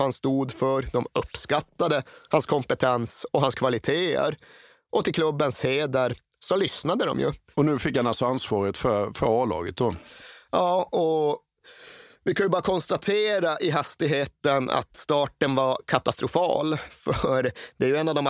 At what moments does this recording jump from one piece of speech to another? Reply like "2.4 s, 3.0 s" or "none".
7.5 s